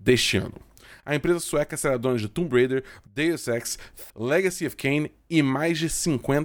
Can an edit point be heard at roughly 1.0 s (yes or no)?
yes